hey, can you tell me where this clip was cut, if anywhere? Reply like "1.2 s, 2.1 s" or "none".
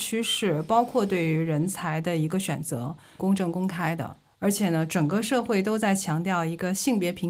3.2 s